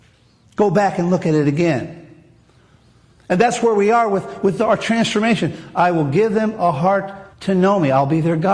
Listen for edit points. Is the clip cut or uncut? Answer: cut